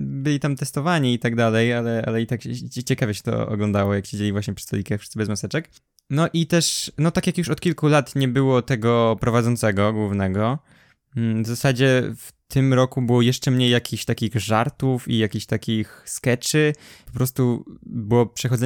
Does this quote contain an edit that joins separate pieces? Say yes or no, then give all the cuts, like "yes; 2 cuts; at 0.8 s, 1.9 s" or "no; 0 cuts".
no; 0 cuts